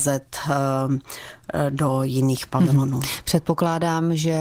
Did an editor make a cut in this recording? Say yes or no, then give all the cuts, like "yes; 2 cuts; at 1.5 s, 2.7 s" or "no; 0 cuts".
no; 0 cuts